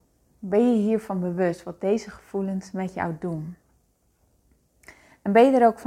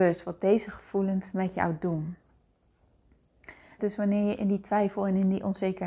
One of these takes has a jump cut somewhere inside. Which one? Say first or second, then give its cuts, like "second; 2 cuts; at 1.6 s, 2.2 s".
second; 1 cut; at 3.8 s